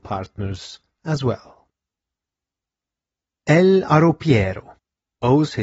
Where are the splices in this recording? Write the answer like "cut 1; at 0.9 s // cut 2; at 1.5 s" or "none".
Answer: none